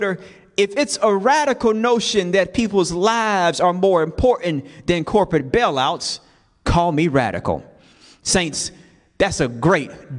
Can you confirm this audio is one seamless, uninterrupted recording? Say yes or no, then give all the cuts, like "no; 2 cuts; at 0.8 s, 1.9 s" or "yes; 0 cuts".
yes; 0 cuts